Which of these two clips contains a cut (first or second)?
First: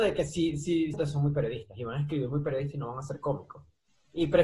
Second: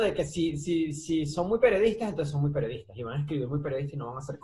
first